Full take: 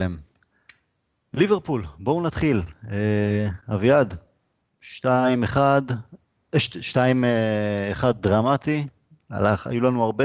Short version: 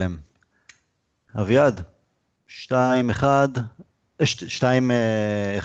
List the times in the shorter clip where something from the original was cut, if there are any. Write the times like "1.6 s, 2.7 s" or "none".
1.3 s

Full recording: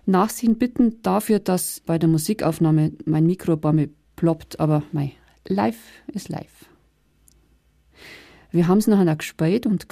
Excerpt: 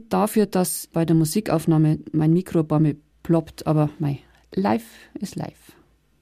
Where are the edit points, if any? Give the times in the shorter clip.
none

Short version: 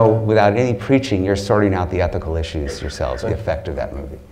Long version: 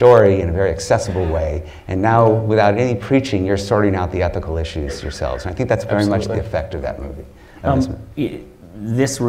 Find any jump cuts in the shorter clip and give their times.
3.2 s

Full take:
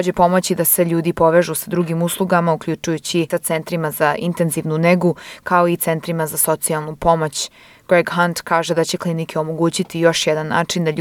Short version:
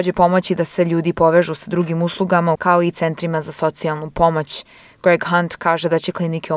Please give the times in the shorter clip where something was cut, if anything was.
2.6 s

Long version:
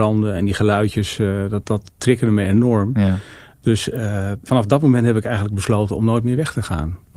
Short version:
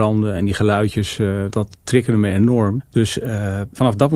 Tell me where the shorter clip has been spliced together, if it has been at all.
1.5 s, 2.8 s

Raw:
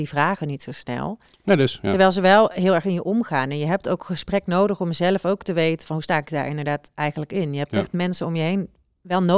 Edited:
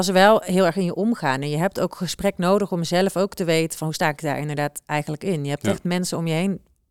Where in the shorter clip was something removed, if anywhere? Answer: none

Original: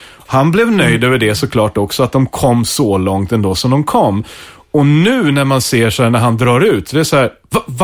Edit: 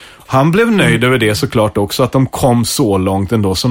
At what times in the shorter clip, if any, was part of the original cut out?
none

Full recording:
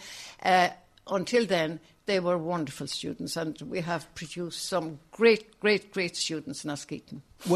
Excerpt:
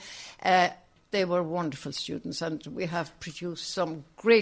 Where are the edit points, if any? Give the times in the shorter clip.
1.0 s

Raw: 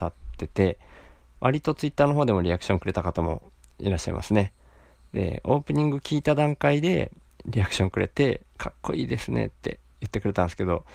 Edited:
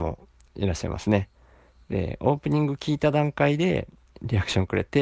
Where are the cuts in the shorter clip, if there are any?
none

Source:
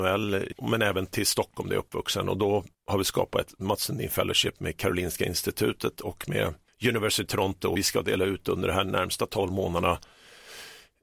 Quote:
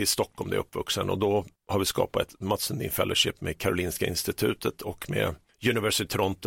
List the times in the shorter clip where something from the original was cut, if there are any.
none

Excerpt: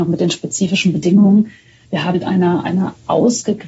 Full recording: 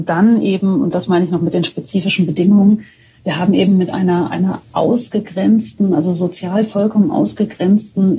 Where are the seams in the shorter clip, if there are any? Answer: 2.1 s

